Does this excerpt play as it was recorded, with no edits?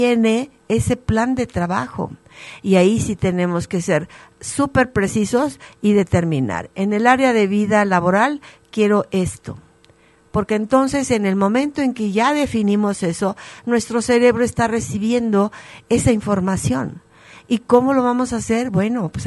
no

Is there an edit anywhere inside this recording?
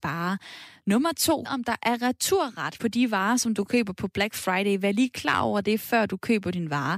yes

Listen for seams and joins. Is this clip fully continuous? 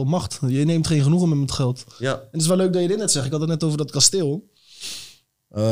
yes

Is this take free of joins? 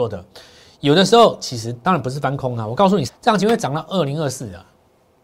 no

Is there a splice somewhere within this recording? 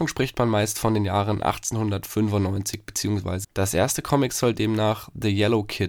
yes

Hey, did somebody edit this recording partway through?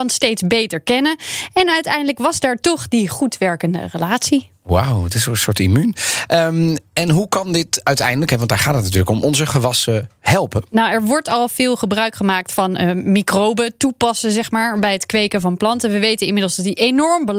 no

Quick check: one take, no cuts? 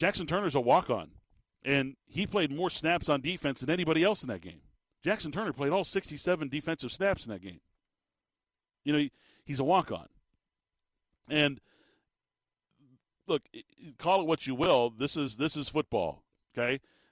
no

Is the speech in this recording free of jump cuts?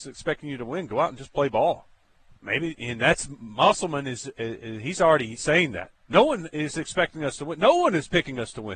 no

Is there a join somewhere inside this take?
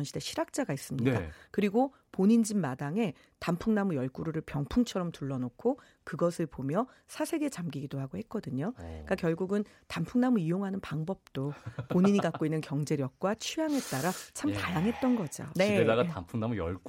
yes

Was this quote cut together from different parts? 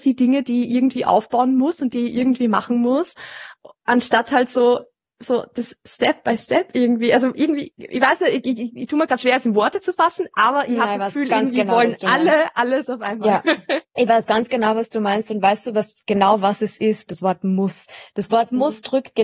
yes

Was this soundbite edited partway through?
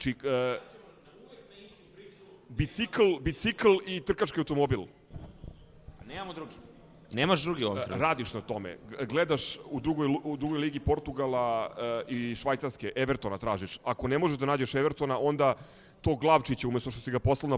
no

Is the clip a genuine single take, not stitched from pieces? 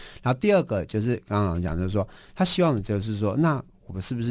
yes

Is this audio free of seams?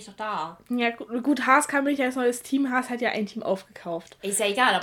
yes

